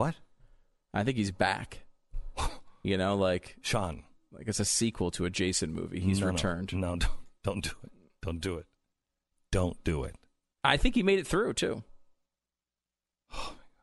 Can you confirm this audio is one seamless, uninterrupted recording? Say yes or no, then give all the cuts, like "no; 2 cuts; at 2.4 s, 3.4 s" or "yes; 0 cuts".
yes; 0 cuts